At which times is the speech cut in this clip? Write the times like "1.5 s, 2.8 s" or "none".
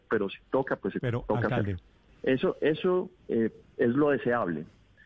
2.1 s, 3.2 s

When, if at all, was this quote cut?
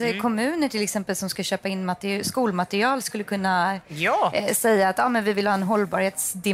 none

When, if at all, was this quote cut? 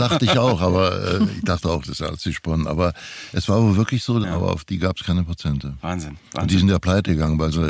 4.2 s

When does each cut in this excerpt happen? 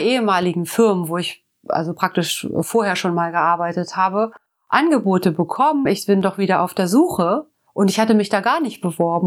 5.9 s

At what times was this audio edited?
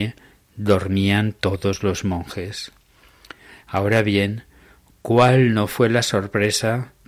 3.6 s

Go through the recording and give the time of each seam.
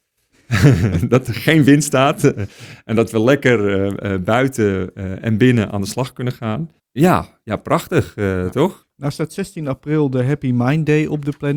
6.8 s, 8.8 s

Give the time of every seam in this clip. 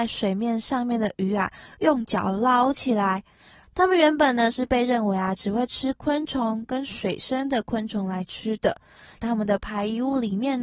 3.6 s, 9.2 s

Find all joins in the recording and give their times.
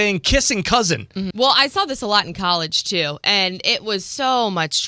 1.3 s

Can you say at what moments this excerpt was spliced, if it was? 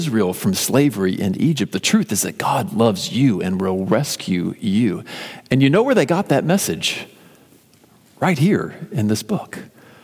none

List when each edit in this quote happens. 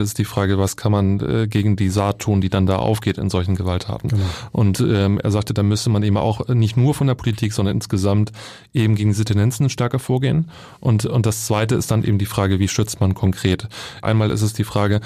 14.0 s

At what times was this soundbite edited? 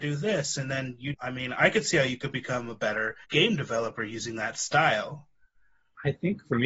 1.1 s, 3.2 s

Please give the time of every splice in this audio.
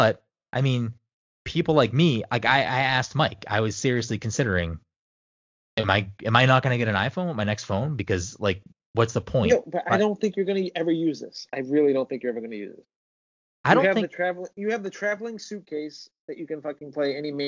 none

